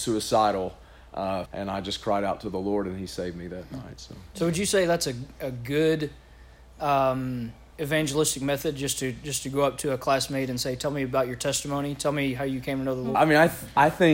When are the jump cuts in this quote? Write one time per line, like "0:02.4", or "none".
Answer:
0:01.5
0:13.1